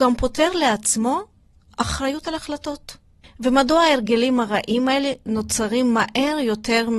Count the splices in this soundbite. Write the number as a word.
one